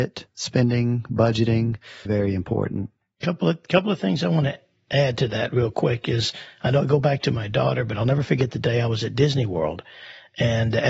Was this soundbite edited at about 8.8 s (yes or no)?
no